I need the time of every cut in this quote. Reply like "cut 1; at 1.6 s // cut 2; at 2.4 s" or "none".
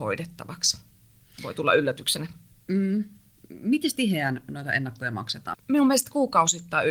cut 1; at 5.5 s